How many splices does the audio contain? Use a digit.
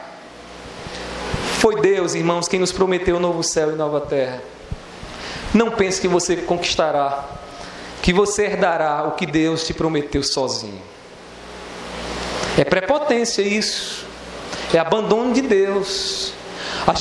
0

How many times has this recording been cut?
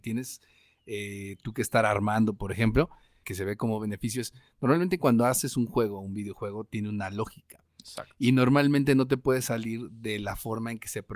1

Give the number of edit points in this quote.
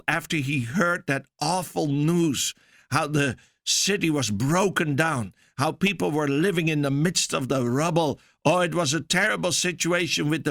0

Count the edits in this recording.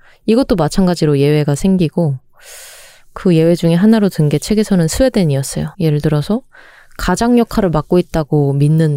1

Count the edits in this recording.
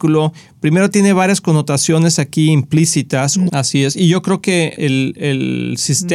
2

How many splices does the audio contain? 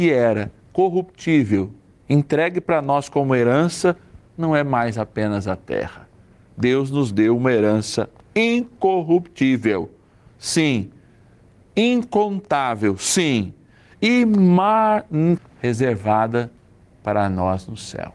2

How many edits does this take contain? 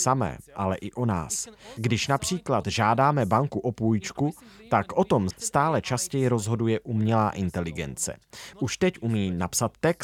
2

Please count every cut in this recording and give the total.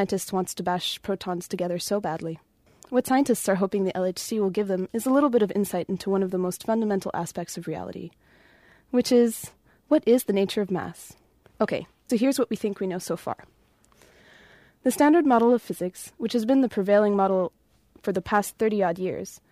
1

